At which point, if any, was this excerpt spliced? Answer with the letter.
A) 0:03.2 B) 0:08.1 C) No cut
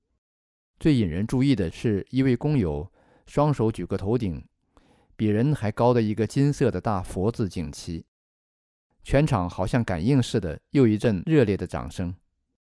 C